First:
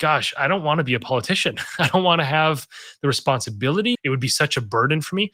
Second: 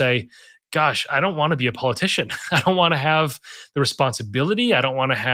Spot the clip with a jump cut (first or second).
first